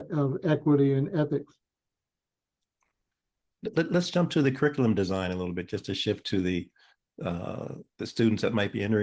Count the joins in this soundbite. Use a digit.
0